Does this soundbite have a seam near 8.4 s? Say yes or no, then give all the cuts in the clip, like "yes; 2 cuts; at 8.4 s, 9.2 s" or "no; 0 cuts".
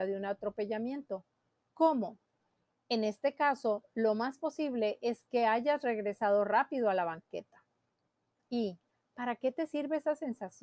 yes; 1 cut; at 8.4 s